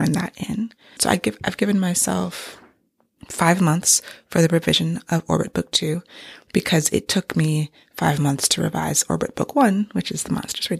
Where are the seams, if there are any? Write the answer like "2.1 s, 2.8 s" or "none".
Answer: 1.0 s